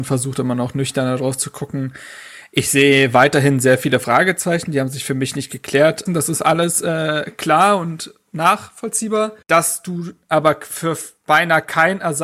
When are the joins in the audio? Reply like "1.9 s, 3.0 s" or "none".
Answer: 6.1 s, 9.4 s